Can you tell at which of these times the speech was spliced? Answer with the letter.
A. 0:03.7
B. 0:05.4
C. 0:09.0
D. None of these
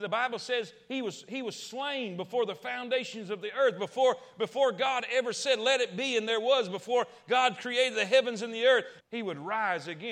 C